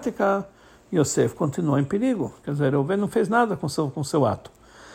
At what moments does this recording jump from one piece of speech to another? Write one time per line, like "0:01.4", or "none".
none